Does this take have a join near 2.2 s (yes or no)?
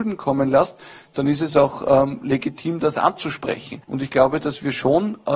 no